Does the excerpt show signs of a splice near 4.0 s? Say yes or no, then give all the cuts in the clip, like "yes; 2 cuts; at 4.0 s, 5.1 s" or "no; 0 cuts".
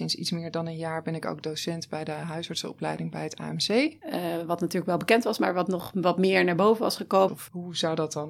yes; 2 cuts; at 4.0 s, 7.3 s